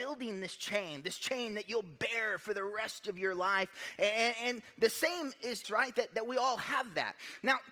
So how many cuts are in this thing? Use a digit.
1